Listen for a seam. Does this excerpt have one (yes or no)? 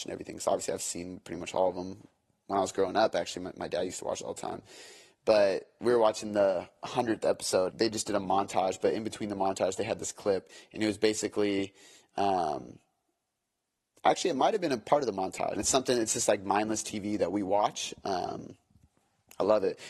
yes